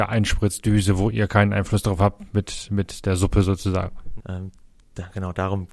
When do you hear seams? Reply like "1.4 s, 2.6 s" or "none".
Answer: 4.2 s